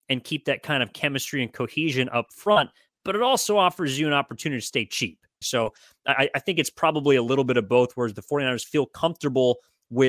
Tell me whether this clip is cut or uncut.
cut